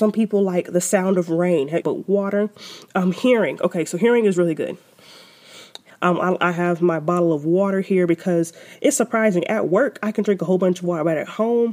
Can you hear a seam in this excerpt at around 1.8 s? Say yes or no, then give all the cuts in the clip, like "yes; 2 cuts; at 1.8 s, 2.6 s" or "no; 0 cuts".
yes; 2 cuts; at 1.8 s, 5.9 s